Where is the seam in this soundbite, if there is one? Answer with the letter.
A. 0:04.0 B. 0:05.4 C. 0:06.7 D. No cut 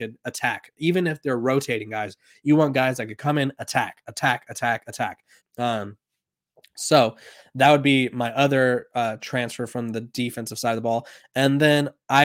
B